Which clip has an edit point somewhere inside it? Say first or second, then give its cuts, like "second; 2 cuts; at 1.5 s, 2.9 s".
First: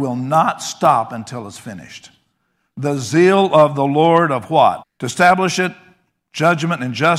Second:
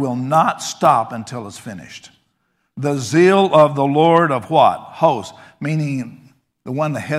first; 1 cut; at 4.8 s